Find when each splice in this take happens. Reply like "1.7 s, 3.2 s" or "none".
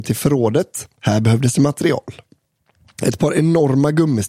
none